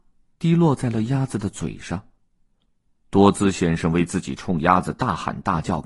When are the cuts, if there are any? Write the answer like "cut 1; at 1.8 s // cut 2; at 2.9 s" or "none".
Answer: none